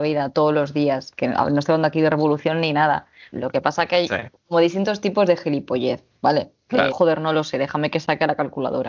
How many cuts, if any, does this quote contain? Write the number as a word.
two